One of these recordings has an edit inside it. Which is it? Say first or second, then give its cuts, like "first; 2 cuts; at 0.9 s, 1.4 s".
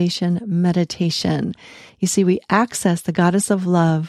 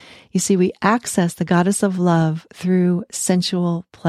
first; 1 cut; at 1.9 s